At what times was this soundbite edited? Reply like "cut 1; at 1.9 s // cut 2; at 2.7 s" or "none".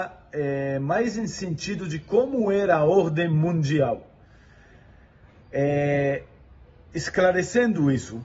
cut 1; at 5.4 s